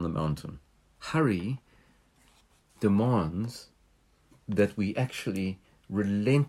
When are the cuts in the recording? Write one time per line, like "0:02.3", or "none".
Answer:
0:01.0